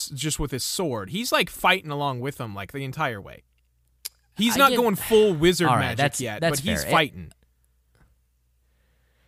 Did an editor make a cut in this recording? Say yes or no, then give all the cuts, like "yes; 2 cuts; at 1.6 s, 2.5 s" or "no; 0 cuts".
no; 0 cuts